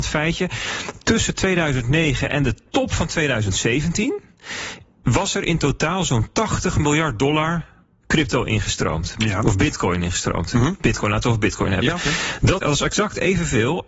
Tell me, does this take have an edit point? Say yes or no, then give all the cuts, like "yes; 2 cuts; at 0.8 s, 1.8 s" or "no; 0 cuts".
yes; 1 cut; at 12.6 s